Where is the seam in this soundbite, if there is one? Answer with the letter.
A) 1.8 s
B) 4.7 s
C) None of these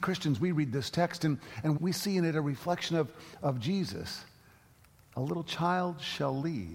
A